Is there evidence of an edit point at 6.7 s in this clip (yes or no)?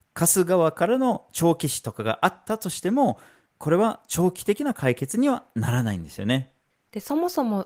yes